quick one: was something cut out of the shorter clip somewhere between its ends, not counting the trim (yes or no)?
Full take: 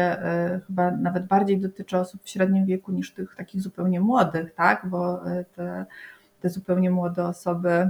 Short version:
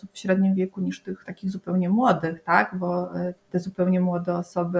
yes